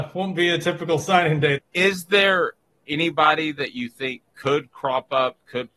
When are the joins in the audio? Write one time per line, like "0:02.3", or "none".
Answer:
0:01.6
0:04.3